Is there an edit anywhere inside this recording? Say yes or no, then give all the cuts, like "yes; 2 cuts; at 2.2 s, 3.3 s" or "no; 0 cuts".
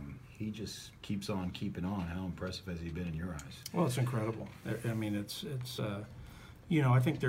no; 0 cuts